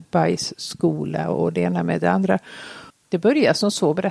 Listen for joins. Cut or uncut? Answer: cut